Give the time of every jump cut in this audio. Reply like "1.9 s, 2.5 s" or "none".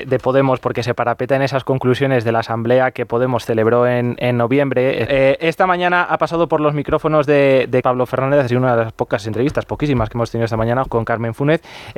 5.1 s, 7.8 s, 10.9 s